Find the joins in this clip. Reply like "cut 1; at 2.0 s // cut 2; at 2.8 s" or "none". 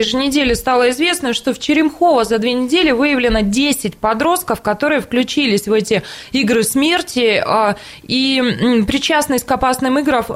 none